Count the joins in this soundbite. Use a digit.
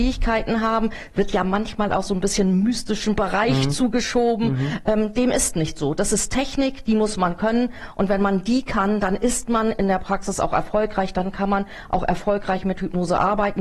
0